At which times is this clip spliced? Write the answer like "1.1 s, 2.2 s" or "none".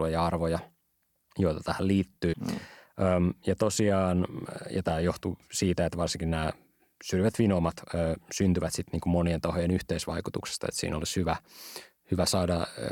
2.3 s